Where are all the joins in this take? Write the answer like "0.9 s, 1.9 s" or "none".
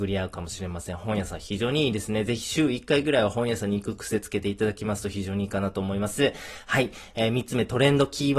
none